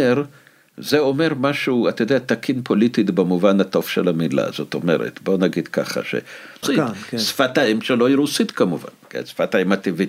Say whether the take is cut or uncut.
cut